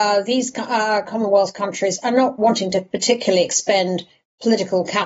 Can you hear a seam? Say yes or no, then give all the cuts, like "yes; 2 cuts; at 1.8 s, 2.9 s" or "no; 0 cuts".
no; 0 cuts